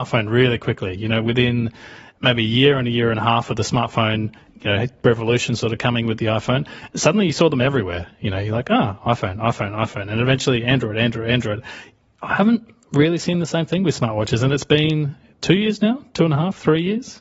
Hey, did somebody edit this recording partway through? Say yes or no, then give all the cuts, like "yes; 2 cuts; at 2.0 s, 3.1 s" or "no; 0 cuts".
no; 0 cuts